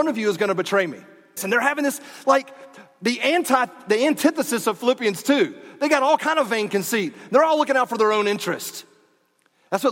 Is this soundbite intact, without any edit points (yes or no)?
no